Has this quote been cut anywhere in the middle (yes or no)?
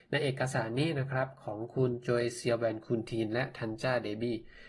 no